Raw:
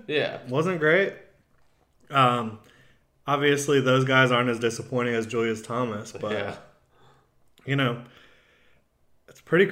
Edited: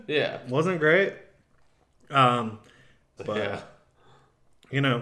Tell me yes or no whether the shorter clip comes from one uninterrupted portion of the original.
no